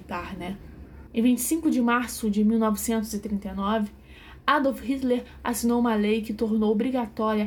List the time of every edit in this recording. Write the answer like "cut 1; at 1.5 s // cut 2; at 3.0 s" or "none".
cut 1; at 1.1 s